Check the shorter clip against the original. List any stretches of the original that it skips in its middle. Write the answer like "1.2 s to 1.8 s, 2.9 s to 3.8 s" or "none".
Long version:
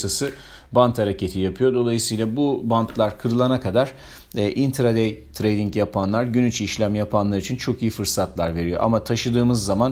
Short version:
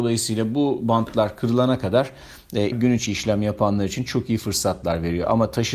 4.5 s to 6.2 s